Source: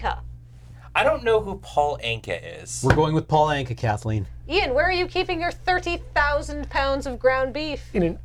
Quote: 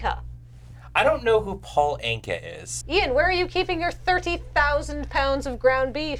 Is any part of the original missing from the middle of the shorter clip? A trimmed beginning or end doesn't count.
yes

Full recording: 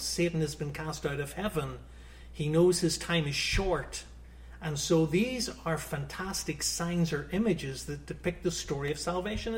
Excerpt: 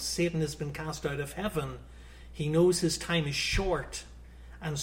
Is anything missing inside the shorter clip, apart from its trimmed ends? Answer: no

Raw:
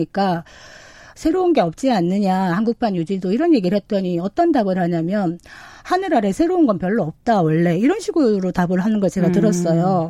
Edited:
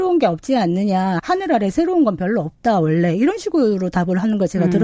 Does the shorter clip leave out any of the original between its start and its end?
yes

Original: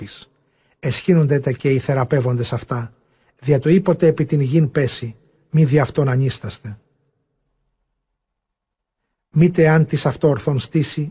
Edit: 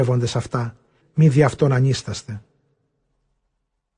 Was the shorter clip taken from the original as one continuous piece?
no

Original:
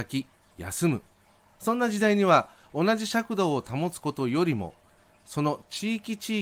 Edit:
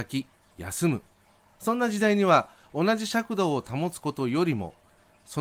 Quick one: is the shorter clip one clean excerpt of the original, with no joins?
yes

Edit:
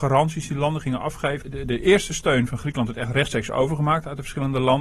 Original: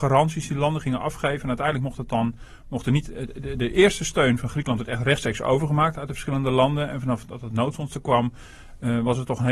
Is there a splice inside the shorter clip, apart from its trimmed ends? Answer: yes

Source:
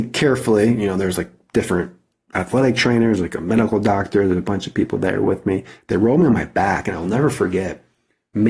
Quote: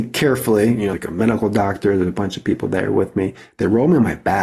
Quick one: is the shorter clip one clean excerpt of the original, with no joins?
no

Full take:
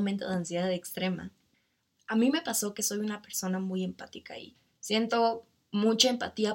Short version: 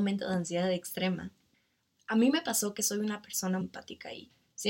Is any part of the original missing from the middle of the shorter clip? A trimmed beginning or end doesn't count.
yes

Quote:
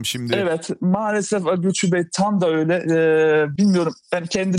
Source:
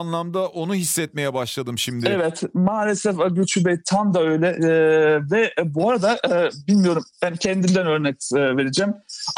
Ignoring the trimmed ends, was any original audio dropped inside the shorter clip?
yes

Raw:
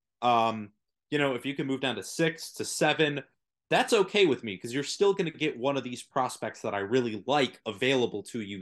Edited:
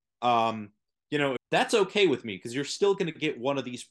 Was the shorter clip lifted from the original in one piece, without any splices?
no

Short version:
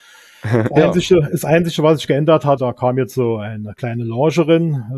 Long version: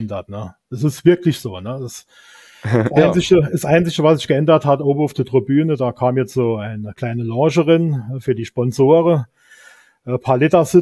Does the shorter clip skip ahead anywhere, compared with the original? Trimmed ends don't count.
yes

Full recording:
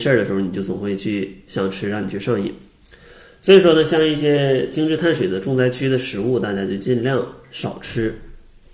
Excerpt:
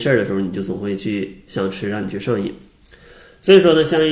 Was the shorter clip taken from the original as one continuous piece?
yes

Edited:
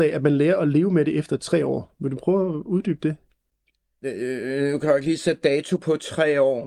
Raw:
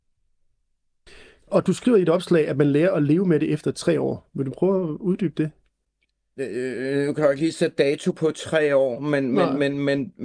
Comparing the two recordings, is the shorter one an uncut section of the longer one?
yes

